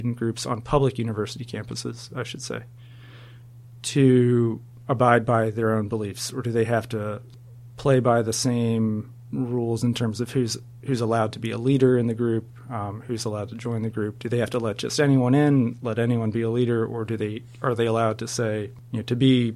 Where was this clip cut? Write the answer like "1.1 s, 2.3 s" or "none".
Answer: none